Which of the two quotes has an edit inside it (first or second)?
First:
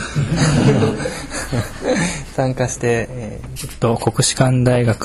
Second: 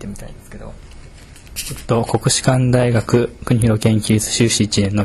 first